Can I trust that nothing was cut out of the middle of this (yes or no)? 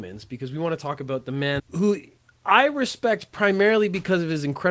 no